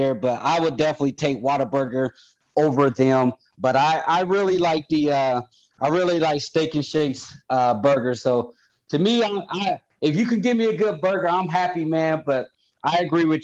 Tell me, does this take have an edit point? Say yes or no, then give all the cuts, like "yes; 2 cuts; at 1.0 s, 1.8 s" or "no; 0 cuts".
no; 0 cuts